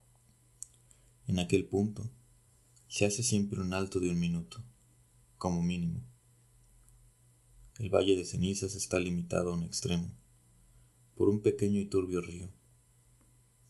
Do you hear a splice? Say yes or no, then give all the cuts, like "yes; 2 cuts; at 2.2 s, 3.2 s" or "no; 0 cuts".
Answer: yes; 1 cut; at 7.7 s